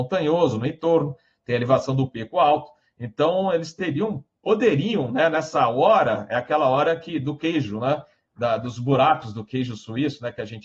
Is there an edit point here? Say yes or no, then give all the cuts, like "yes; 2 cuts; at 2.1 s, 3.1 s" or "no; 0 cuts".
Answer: no; 0 cuts